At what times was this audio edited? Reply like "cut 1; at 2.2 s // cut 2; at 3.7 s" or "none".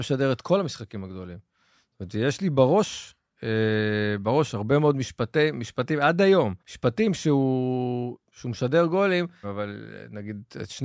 cut 1; at 6.6 s // cut 2; at 8.2 s // cut 3; at 9.4 s